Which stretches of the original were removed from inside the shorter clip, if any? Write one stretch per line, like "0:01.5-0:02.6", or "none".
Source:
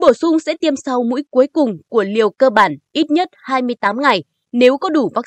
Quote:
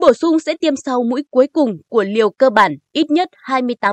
none